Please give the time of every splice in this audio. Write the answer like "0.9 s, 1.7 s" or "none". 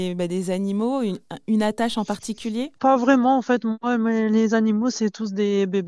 2.8 s